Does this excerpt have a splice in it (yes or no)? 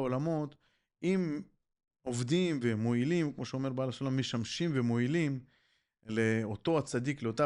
no